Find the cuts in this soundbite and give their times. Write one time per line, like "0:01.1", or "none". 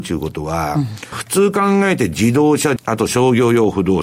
0:01.1
0:02.8